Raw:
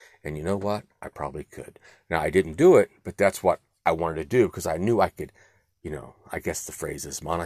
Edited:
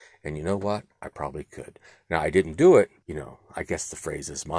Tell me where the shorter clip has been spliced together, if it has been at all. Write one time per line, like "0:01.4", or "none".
0:03.0